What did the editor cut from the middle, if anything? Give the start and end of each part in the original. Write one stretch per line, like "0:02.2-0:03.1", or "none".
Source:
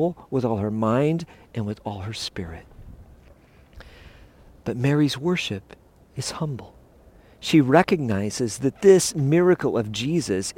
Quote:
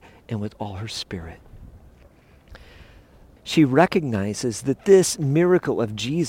0:04.6-0:07.3